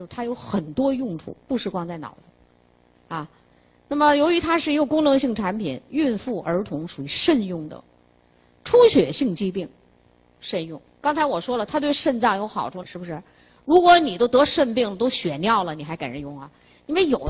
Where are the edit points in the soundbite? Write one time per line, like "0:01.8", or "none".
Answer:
0:12.8